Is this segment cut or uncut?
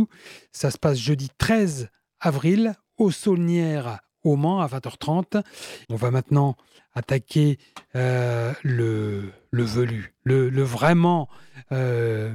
cut